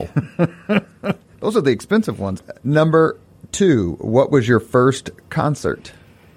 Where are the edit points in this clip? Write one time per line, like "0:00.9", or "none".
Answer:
0:02.4